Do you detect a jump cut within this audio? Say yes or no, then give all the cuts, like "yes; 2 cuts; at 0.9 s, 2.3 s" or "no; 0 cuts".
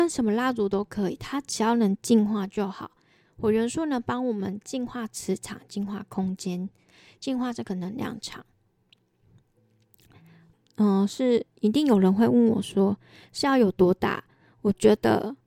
no; 0 cuts